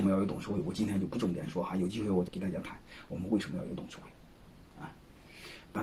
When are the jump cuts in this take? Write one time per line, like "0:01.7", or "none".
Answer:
0:02.3